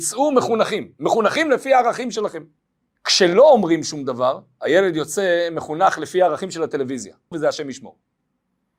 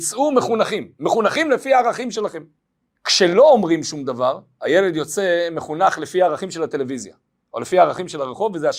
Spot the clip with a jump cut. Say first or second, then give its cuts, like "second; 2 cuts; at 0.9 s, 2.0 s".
first; 1 cut; at 7.3 s